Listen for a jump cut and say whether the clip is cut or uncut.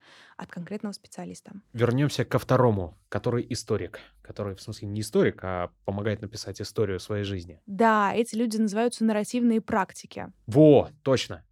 uncut